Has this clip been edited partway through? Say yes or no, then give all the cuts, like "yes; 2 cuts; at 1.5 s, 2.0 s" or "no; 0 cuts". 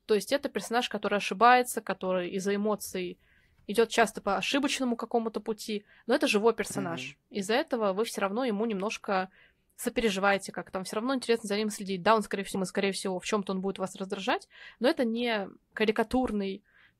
yes; 1 cut; at 12.5 s